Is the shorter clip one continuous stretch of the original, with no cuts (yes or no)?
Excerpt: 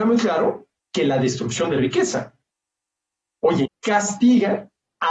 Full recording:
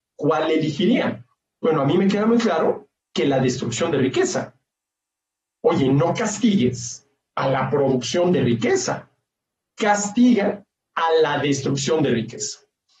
no